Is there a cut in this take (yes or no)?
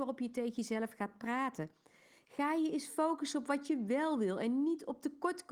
no